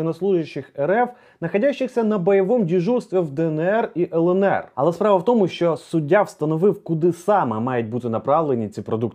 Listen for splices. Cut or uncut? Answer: cut